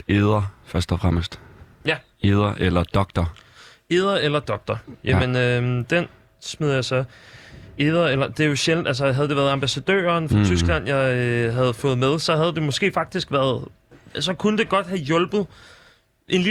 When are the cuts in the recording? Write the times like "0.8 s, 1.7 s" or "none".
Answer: none